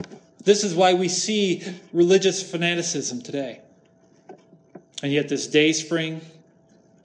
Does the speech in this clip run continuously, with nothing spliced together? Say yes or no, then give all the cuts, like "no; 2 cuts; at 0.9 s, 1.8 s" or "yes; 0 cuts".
no; 1 cut; at 4.9 s